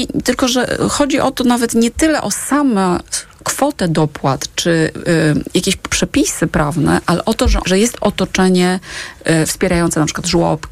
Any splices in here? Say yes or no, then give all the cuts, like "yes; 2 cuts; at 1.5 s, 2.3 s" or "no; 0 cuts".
yes; 1 cut; at 7.6 s